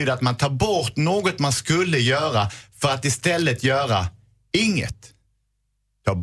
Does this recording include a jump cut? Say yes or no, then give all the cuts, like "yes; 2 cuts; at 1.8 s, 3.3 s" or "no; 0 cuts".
no; 0 cuts